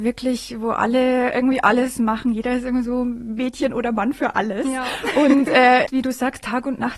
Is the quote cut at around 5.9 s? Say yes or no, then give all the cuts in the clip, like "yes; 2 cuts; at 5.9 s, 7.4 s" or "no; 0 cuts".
yes; 1 cut; at 5.9 s